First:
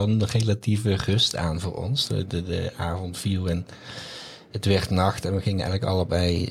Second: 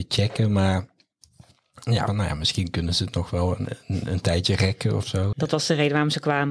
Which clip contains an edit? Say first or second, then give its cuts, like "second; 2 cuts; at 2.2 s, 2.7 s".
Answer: second; 2 cuts; at 2.1 s, 5.3 s